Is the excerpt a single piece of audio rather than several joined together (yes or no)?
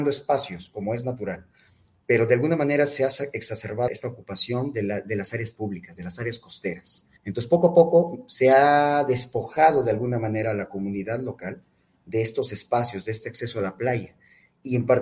no